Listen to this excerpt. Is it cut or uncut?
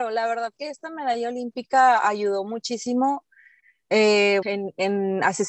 cut